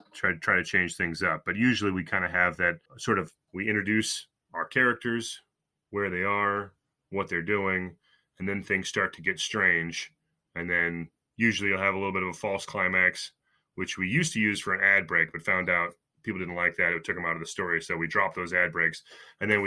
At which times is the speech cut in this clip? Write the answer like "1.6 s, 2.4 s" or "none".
none